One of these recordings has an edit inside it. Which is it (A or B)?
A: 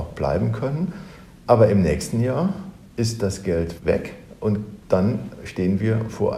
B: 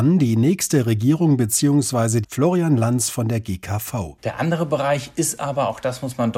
B